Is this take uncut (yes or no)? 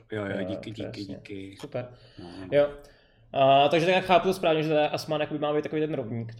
yes